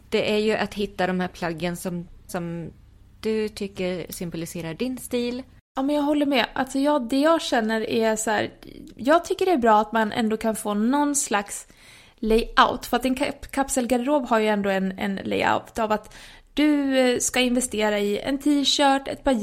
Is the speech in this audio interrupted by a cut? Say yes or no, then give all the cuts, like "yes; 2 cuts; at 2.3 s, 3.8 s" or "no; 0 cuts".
yes; 1 cut; at 2.3 s